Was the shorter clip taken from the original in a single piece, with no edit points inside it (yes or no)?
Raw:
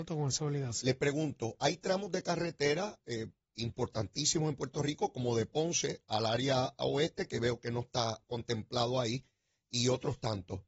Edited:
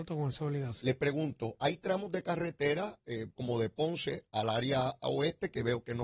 no